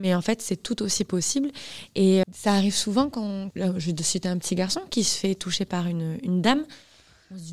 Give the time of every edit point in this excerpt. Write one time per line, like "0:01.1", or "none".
0:02.2
0:03.5